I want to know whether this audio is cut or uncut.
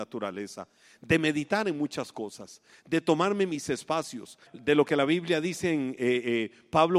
cut